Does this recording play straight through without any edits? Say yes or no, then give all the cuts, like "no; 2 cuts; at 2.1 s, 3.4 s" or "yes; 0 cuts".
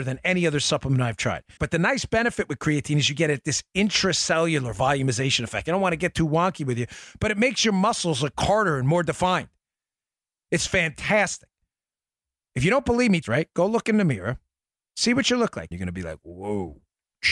no; 3 cuts; at 1.6 s, 13.2 s, 15.7 s